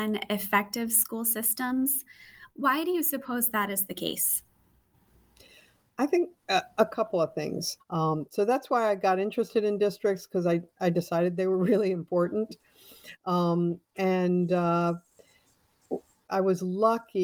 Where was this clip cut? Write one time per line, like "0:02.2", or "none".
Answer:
0:07.8
0:16.3